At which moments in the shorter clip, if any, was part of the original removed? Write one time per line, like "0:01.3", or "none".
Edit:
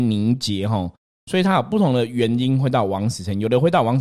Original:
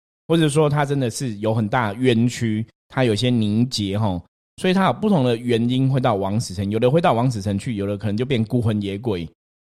none